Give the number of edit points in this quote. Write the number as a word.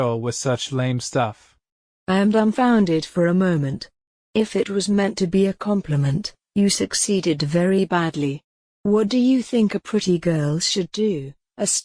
zero